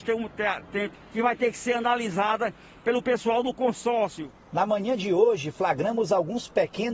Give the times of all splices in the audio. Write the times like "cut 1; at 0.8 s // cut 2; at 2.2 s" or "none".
cut 1; at 1.0 s